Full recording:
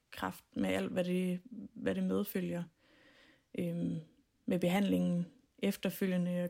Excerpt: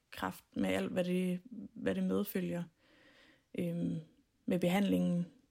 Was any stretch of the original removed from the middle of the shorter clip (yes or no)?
no